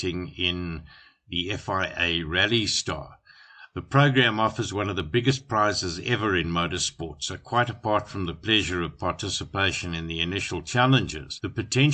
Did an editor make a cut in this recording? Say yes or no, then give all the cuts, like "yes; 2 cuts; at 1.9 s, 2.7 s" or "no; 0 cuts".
no; 0 cuts